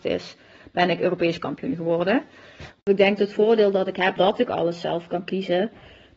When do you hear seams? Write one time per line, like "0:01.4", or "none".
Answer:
0:02.8
0:04.2

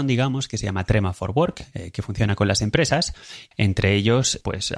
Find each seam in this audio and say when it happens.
0:03.5

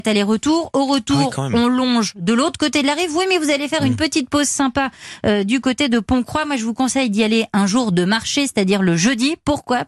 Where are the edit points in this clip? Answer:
none

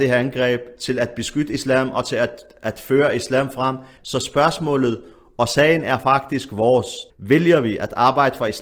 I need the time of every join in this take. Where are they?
0:04.0
0:07.1

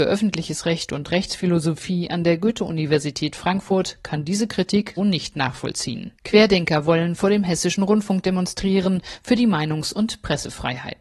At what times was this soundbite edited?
0:05.0
0:06.1

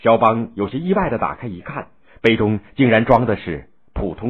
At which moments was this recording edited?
none

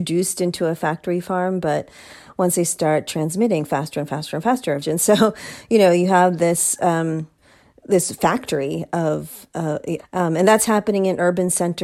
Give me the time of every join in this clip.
0:04.8
0:10.0

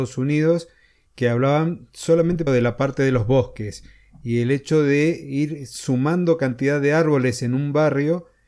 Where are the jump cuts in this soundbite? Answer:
0:02.5

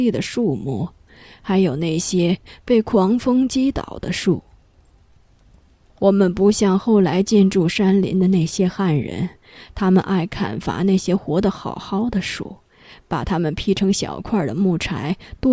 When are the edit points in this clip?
none

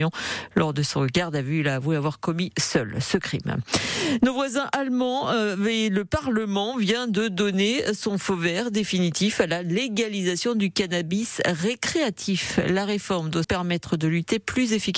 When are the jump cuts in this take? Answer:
0:13.4

